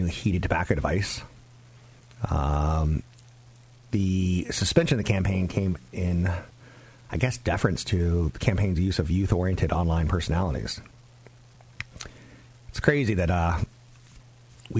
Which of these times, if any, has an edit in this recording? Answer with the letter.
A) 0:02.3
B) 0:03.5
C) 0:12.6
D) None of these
D